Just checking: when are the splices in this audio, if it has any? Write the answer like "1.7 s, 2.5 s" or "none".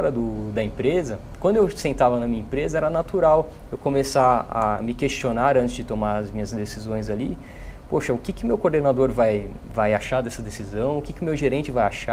none